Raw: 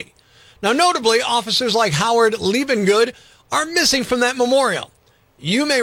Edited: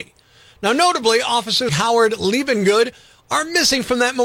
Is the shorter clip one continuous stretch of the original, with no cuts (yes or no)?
no